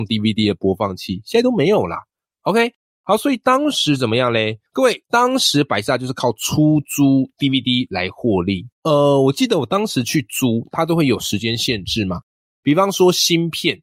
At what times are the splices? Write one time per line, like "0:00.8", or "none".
0:04.7
0:08.8